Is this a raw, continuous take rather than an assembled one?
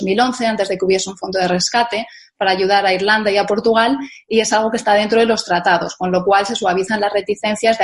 yes; 0 cuts

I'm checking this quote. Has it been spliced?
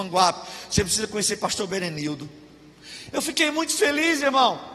no; 0 cuts

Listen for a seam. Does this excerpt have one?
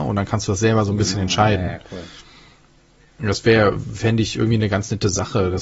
no; 0 cuts

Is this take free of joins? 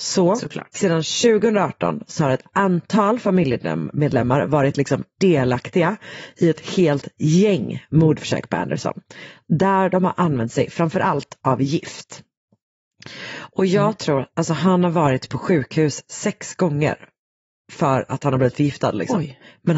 yes; 0 cuts

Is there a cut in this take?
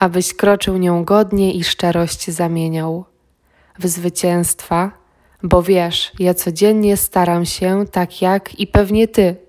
no; 0 cuts

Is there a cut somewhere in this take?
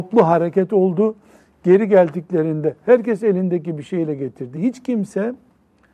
no; 0 cuts

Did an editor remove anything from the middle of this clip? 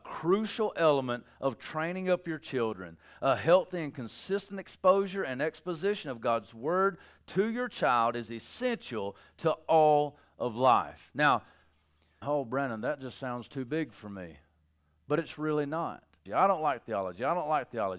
yes; 2 cuts; at 12.2 s, 16.3 s

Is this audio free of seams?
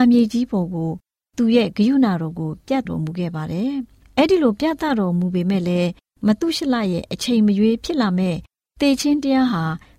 no; 1 cut; at 2.9 s

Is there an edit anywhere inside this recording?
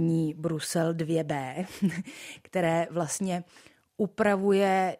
no; 0 cuts

